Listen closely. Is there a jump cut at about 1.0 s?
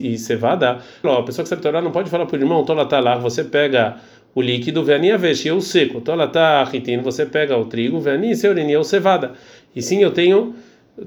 yes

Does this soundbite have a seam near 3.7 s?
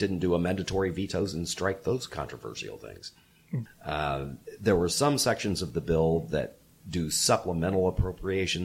yes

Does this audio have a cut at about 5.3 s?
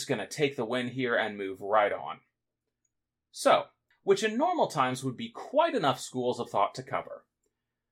no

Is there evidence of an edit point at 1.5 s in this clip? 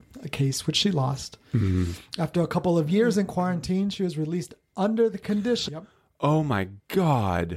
no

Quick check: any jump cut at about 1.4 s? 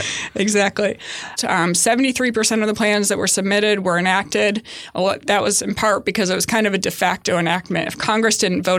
yes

